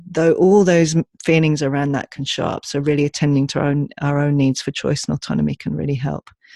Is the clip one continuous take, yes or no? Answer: yes